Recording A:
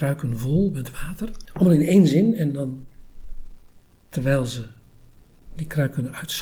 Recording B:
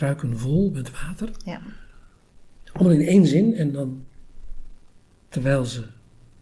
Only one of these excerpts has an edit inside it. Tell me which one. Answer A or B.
A